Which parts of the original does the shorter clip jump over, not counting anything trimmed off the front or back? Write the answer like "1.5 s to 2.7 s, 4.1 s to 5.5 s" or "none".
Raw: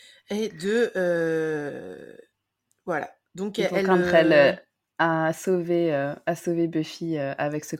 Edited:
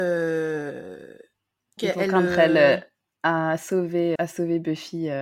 2.8 s to 3.5 s, 5.9 s to 6.2 s